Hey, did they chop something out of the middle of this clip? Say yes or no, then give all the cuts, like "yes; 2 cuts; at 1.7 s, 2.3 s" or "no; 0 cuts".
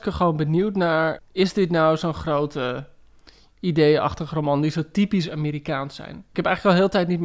yes; 1 cut; at 1.2 s